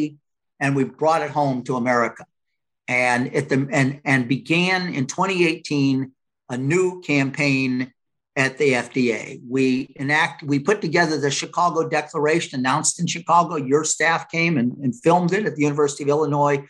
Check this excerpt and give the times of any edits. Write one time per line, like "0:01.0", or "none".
none